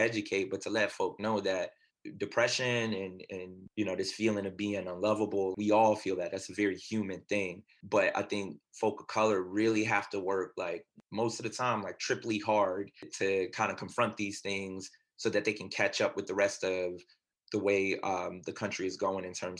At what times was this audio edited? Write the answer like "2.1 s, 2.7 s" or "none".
5.5 s